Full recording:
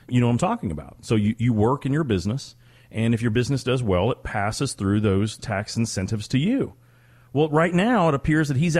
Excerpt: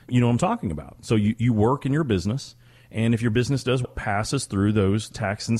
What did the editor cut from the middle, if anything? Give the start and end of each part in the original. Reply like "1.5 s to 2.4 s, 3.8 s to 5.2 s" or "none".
3.8 s to 4.1 s

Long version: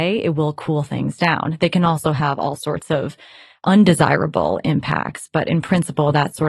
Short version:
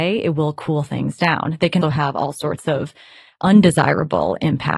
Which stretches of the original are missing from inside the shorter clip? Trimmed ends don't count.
1.8 s to 2.0 s

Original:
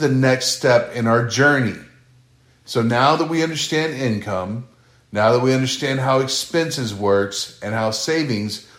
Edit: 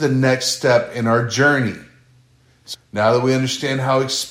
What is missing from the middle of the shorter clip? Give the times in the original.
2.7 s to 4.9 s

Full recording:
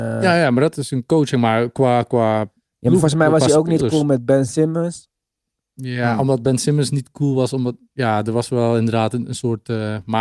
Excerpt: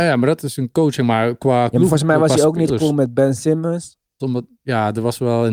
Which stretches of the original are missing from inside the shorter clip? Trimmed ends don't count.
2.0 s to 2.8 s, 5.3 s to 7.5 s

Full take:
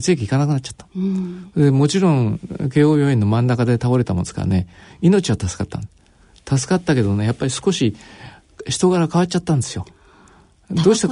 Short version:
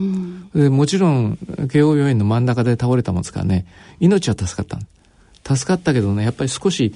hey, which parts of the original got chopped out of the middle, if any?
none

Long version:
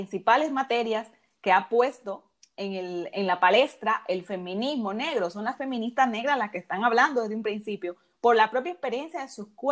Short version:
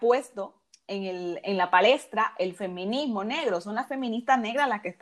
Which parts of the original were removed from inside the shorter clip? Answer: none

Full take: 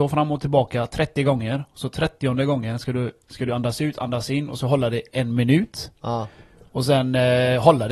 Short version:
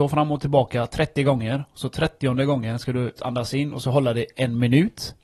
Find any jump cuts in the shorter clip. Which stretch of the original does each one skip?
3.2 s to 3.9 s

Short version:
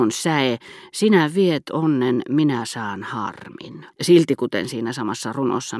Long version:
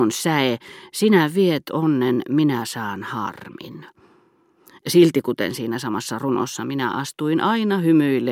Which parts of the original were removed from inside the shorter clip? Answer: 3.9 s to 4.8 s

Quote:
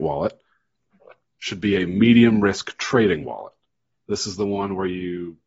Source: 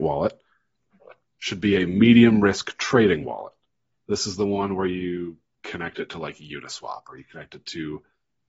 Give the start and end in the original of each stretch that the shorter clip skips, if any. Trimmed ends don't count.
none

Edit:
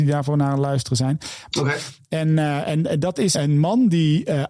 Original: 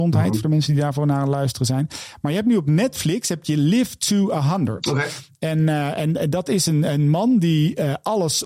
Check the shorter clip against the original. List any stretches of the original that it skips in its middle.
2.2 s to 4.8 s, 6.6 s to 6.8 s

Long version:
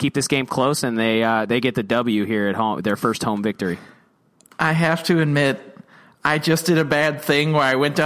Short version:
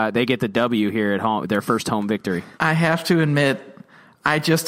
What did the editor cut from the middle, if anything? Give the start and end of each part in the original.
3.9 s to 4.5 s

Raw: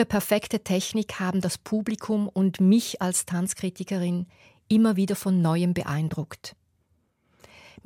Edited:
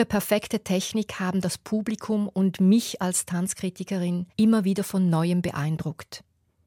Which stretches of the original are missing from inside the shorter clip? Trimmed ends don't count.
4.3 s to 4.6 s

